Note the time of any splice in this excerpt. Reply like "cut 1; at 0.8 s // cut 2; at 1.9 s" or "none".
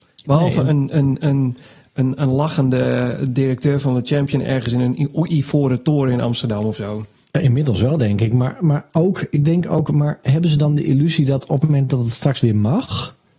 none